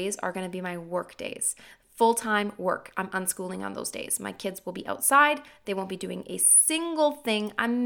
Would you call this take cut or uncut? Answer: uncut